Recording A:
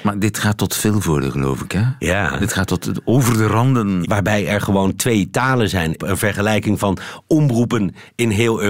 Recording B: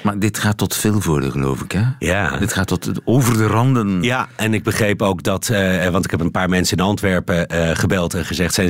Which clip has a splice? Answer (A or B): A